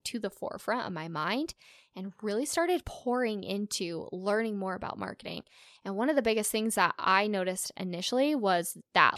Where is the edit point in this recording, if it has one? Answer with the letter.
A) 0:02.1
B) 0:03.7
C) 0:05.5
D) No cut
D